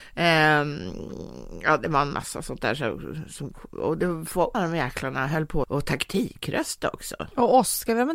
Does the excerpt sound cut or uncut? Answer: cut